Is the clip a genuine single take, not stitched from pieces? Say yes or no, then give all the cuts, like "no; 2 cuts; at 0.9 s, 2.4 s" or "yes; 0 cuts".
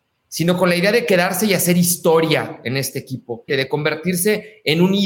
no; 1 cut; at 3.5 s